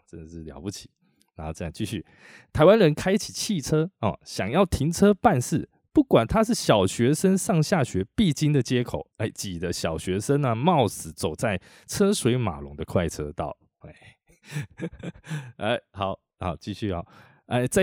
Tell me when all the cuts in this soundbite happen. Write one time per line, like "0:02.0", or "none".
0:09.1
0:13.8